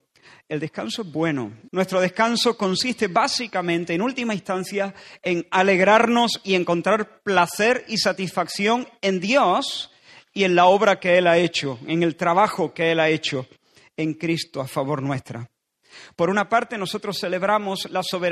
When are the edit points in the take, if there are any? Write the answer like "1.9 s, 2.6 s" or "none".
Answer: 1.7 s